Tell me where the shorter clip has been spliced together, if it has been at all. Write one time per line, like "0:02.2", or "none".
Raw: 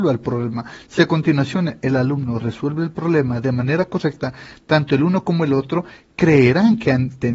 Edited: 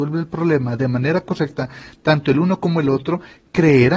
none